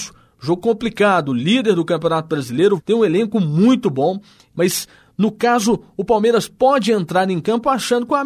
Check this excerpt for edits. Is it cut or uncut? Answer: cut